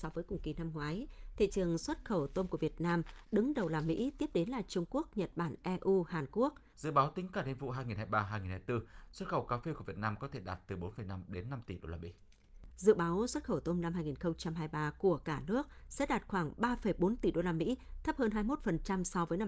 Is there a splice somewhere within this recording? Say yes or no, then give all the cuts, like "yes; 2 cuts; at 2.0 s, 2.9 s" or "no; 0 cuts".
yes; 2 cuts; at 6.7 s, 12.7 s